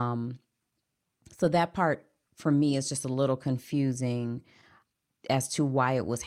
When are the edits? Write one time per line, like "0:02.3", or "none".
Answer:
none